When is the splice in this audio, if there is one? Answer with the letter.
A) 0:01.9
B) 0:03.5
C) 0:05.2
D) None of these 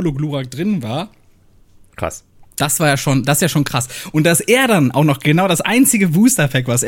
D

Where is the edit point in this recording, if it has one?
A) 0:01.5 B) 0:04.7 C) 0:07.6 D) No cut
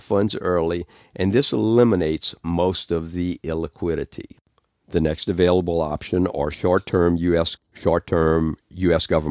C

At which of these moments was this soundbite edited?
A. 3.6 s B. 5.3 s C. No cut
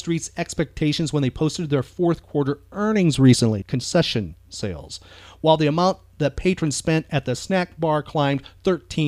A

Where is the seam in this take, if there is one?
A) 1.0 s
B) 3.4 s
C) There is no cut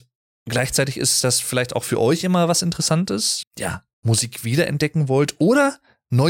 B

